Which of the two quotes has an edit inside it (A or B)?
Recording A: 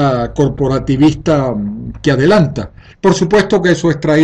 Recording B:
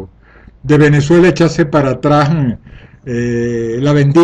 A